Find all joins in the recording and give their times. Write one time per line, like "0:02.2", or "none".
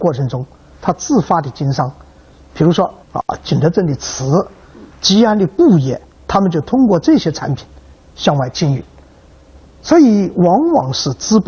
0:03.0
0:04.9
0:06.2

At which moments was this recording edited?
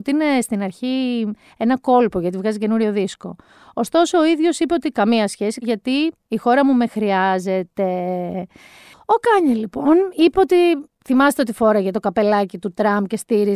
0:05.6

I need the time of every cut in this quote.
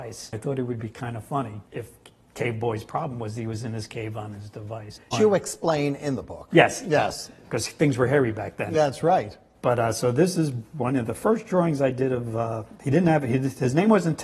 0:05.1

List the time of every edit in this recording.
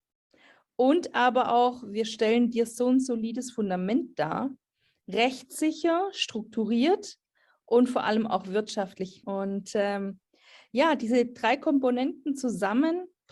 0:09.2

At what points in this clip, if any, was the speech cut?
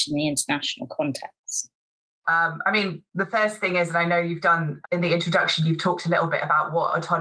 0:02.2
0:04.8

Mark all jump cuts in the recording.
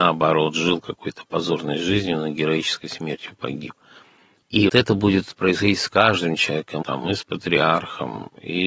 0:04.7
0:06.8

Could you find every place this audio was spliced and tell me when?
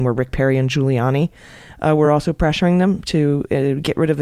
none

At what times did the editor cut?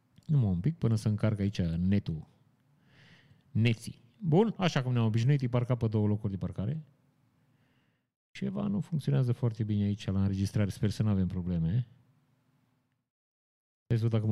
0:04.6

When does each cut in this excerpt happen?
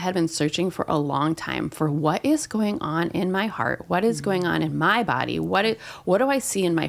none

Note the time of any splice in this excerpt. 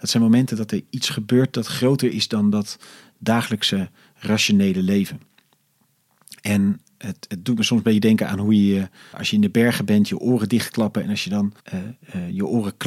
0:09.1
0:11.6

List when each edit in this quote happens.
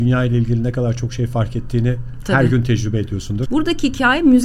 0:03.5

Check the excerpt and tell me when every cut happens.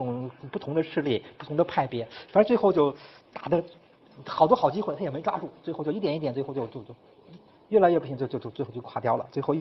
0:06.7

